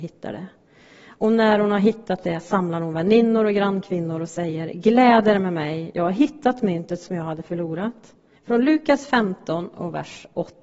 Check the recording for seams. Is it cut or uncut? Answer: cut